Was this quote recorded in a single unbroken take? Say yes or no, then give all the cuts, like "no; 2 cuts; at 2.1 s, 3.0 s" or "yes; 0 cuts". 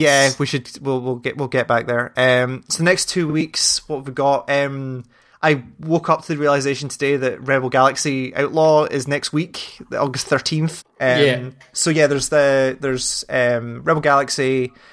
no; 1 cut; at 10.8 s